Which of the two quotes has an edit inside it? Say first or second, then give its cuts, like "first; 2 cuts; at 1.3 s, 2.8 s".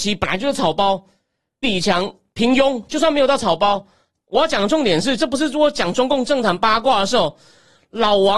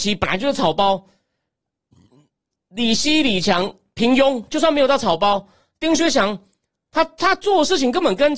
first; 3 cuts; at 1.6 s, 4.2 s, 5.2 s